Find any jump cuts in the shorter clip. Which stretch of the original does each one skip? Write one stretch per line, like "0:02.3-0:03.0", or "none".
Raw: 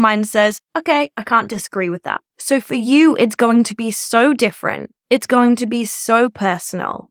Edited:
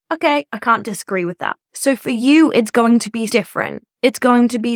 0:03.9-0:04.3